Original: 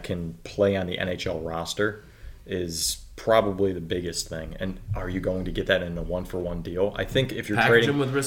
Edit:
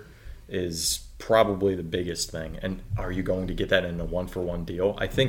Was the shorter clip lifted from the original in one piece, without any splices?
yes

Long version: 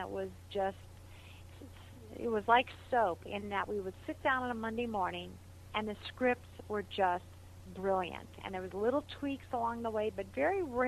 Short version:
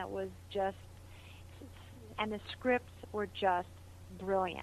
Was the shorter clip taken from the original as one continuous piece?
no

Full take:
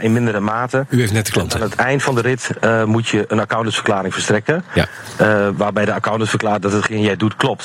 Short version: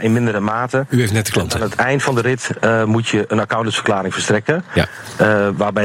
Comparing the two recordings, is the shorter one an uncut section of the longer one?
yes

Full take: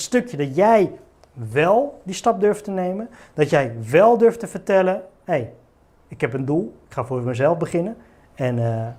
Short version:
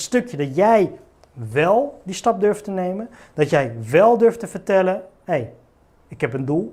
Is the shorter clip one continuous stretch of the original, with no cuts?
yes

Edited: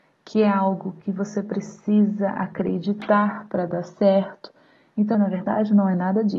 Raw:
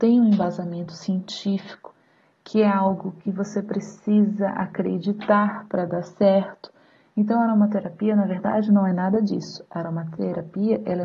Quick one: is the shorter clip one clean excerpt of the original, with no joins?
no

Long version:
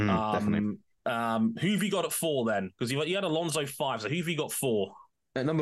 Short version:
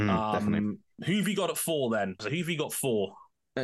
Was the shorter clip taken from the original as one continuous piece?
no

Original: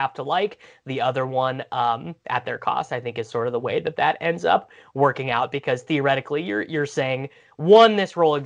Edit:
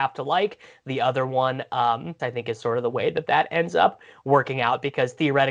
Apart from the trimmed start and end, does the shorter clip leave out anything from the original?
yes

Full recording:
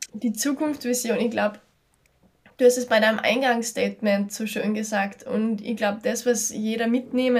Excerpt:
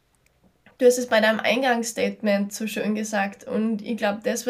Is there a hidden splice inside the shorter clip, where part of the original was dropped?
no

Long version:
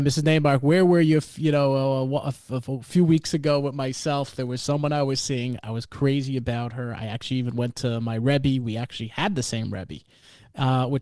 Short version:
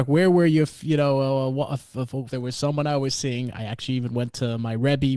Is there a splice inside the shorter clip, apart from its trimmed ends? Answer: yes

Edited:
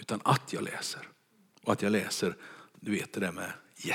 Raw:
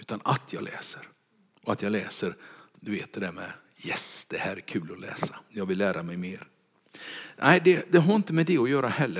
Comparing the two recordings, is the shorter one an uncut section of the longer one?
yes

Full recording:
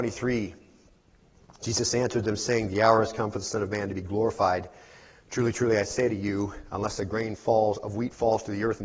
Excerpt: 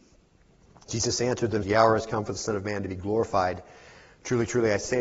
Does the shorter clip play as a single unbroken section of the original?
no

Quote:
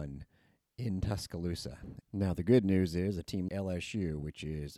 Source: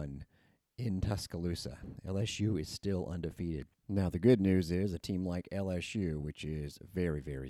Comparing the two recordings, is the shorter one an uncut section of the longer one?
no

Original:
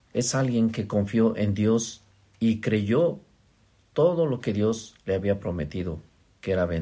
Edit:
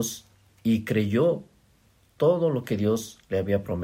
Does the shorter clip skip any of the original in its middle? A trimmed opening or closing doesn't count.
no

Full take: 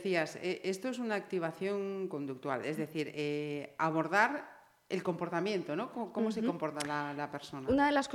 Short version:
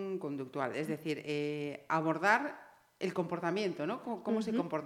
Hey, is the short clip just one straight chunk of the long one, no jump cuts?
yes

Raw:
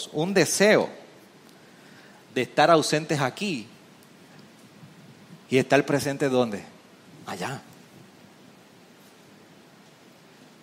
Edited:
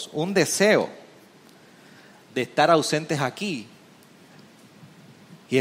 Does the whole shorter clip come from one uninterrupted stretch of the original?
yes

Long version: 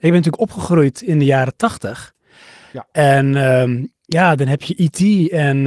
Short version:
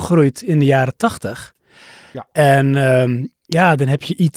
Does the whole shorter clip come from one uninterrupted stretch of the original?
yes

